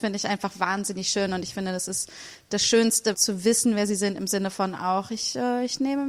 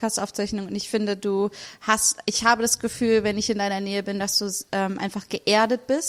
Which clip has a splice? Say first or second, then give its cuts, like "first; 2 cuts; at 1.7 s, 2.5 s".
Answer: first; 1 cut; at 3.1 s